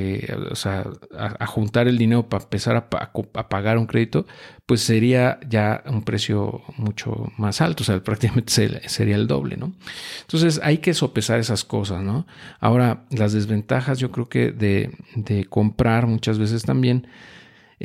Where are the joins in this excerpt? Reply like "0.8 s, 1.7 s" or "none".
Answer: none